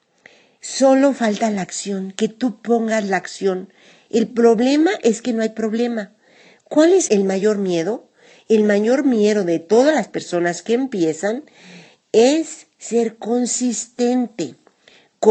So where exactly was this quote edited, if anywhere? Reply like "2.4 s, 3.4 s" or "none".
7.1 s